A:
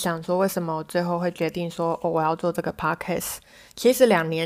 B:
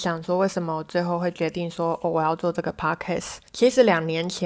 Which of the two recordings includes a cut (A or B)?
B